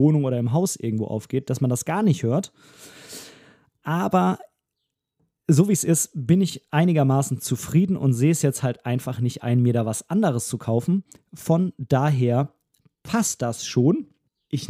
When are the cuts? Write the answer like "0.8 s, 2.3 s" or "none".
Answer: none